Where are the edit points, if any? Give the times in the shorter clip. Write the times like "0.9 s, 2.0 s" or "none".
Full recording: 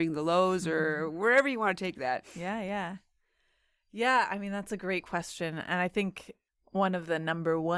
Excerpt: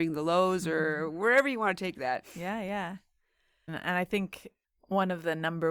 3.7 s